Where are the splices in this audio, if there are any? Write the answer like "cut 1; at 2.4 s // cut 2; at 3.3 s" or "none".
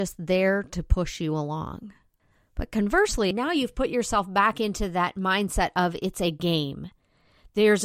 cut 1; at 3.3 s